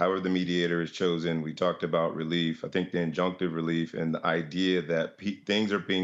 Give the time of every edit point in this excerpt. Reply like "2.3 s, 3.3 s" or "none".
none